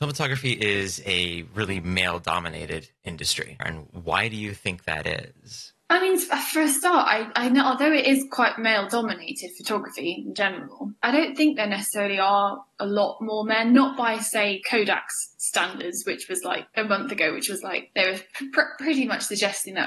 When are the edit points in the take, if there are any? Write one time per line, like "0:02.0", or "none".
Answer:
0:03.6